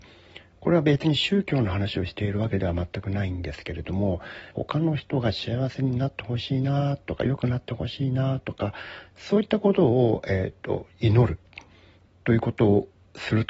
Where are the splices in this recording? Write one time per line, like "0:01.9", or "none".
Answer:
0:04.5